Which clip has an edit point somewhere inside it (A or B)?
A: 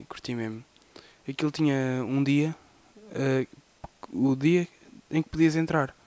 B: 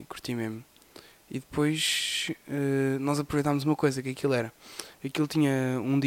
A